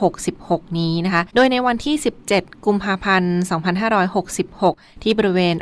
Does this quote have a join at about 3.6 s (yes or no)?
no